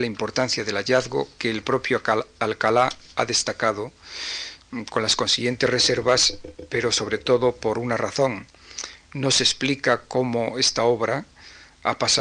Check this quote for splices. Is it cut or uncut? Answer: cut